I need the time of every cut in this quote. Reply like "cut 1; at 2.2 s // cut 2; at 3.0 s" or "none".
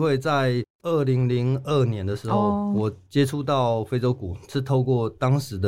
none

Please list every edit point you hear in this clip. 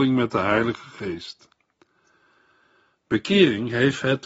none

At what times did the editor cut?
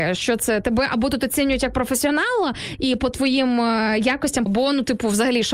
cut 1; at 4.5 s

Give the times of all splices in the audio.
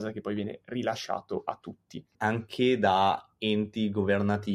cut 1; at 2.1 s

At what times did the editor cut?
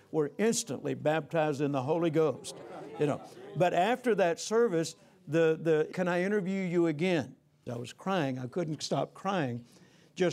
cut 1; at 5.9 s // cut 2; at 7.7 s

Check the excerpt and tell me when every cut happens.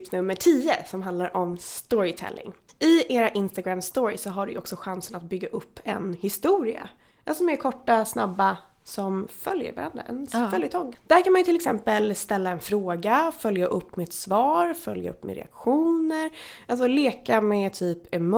none

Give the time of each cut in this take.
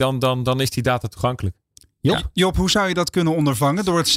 none

